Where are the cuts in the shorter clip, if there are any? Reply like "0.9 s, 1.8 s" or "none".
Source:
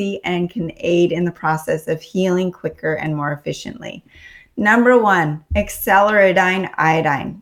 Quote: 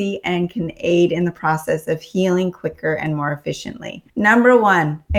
4.1 s